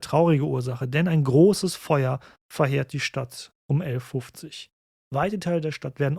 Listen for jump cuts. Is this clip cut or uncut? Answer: uncut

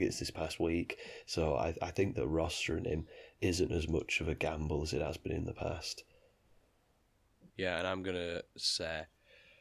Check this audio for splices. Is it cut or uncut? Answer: cut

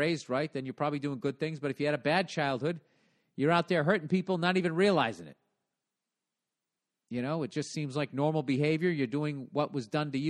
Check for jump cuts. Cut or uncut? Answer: uncut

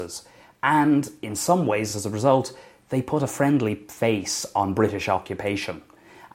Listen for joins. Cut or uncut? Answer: uncut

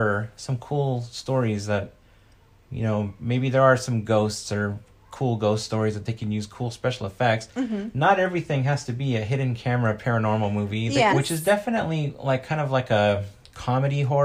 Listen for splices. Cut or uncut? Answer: cut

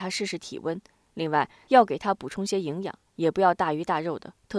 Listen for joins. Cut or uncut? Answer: uncut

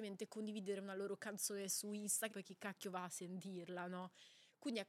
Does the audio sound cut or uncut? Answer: cut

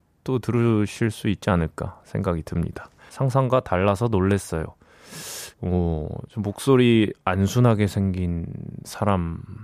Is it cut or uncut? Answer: cut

